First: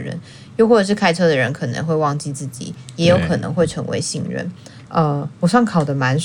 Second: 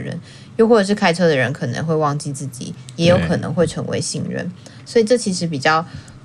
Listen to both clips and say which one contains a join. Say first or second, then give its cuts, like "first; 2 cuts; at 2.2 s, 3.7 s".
first; 1 cut; at 4.9 s